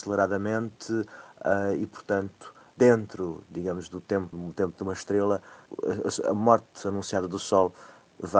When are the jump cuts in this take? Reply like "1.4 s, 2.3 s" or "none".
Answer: 4.3 s